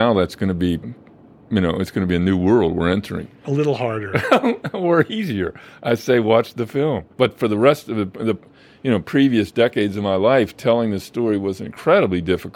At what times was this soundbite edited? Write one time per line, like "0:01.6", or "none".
0:07.1